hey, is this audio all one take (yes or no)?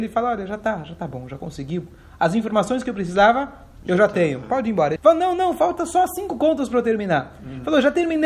no